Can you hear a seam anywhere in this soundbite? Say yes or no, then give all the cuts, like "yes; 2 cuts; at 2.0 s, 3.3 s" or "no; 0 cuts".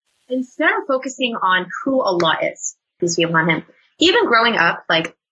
yes; 1 cut; at 3.0 s